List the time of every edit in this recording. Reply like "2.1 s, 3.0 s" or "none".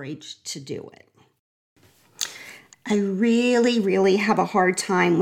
2.7 s